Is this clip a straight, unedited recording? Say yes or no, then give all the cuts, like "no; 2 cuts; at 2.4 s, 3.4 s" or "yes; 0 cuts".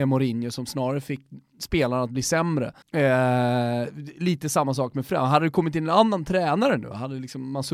no; 1 cut; at 2.8 s